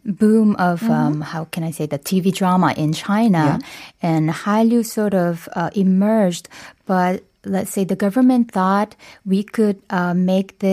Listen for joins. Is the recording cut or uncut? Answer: uncut